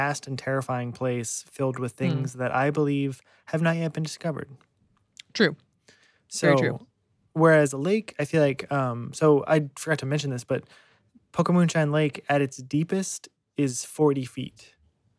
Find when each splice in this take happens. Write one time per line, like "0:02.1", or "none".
none